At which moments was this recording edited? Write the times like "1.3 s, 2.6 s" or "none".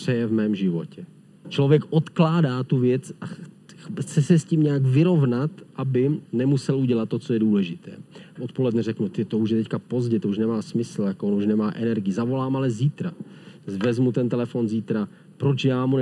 1.4 s, 8.4 s